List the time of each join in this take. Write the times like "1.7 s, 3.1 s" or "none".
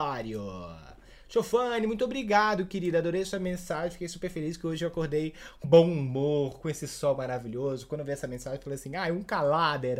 5.6 s